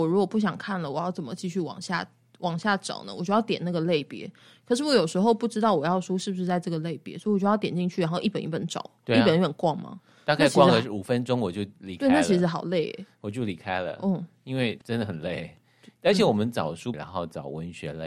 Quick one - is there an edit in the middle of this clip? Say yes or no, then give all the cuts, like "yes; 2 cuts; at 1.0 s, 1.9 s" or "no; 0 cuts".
yes; 2 cuts; at 14.8 s, 16.9 s